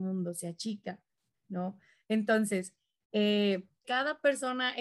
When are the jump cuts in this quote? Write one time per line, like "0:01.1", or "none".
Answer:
0:03.8